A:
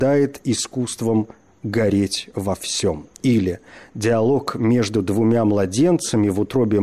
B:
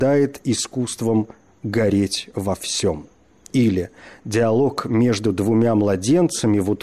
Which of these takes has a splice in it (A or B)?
A